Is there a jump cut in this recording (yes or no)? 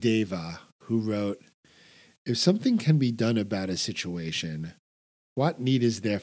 no